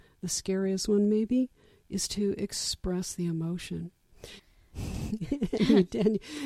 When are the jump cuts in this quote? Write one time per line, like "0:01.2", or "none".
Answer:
0:04.4